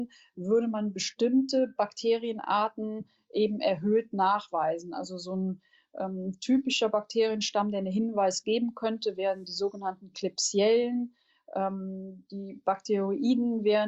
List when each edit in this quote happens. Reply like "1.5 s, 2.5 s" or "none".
none

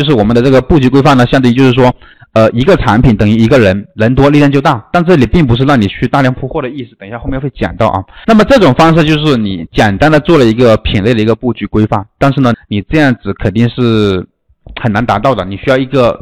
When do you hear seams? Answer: 8.2 s, 12.5 s

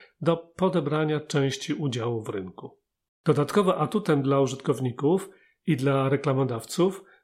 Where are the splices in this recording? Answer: 3.1 s

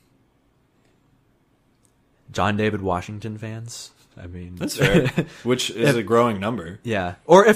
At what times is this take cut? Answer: none

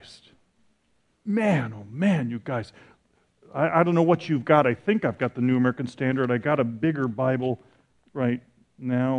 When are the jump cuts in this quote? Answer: none

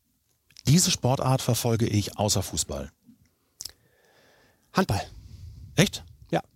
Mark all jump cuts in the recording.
none

